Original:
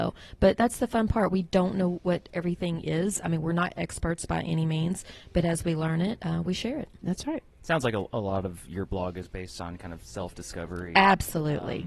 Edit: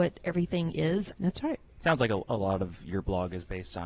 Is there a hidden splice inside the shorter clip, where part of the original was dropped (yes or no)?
yes